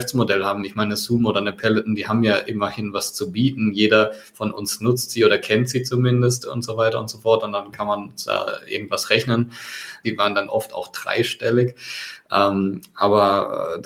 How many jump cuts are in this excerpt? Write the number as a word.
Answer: two